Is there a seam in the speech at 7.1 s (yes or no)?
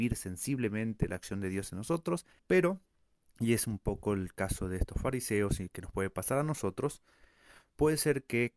no